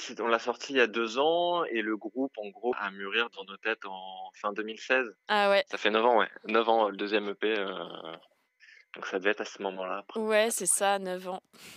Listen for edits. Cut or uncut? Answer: cut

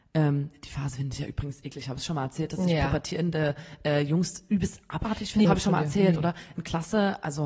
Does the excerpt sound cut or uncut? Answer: cut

